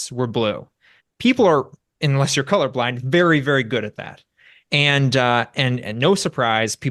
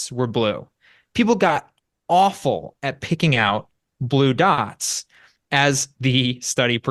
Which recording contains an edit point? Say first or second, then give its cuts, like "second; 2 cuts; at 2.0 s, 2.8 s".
first; 1 cut; at 1.0 s